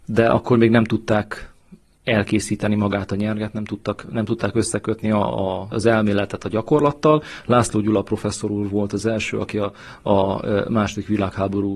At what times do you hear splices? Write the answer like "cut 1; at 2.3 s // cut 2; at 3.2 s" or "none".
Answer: none